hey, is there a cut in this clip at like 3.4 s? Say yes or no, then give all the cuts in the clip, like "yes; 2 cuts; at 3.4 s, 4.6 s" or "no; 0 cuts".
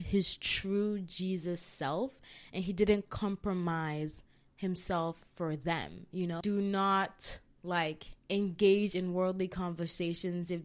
no; 2 cuts; at 6.4 s, 8.2 s